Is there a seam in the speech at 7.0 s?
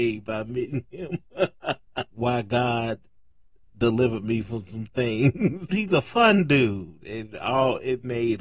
yes; 3 cuts; at 2.1 s, 5.7 s, 7.0 s

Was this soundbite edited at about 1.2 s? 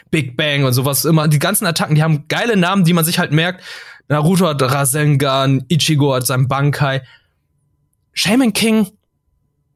no; 0 cuts

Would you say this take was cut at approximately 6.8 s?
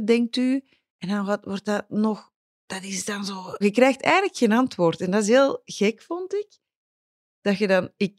no; 1 cut; at 3.6 s

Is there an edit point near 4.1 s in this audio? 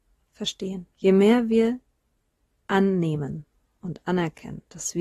no; 1 cut; at 0.9 s

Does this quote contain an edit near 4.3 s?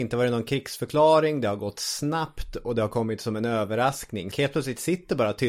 yes; 1 cut; at 4.3 s

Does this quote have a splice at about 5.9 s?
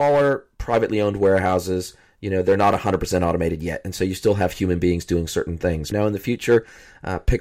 yes; 1 cut; at 5.9 s

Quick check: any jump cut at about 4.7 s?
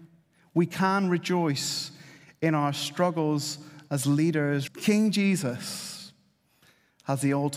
yes; 1 cut; at 4.7 s

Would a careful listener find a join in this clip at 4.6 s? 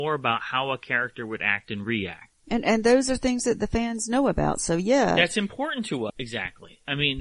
no; 1 cut; at 6.1 s

